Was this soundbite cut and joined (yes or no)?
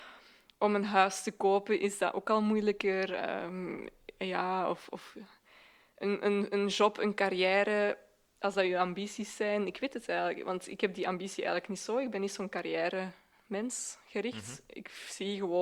no